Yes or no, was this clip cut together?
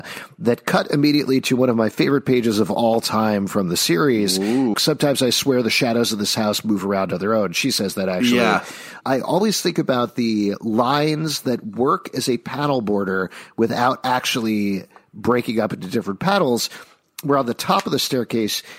yes